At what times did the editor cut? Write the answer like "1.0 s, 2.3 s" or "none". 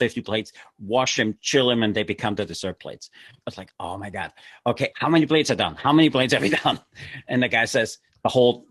3.4 s, 4.9 s